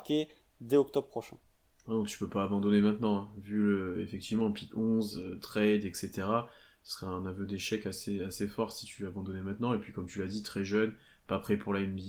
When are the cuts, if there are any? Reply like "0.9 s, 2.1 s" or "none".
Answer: none

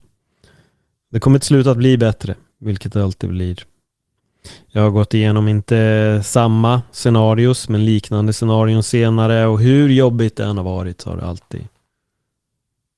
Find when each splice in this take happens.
none

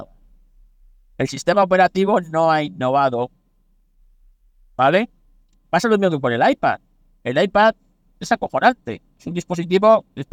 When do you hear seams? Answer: 5.7 s, 8.0 s

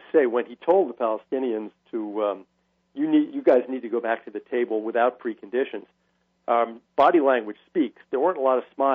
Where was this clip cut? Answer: none

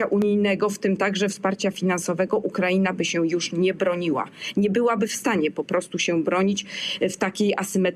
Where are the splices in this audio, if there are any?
none

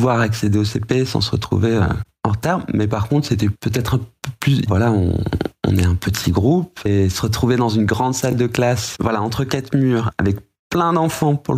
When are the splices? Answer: 4.7 s

